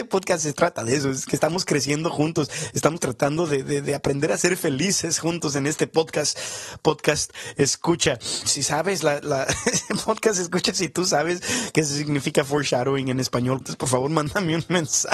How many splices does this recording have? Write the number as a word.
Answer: two